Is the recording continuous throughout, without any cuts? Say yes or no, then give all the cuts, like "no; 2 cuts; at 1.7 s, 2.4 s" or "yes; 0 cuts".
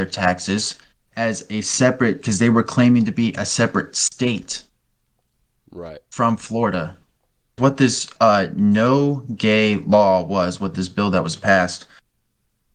no; 1 cut; at 7.6 s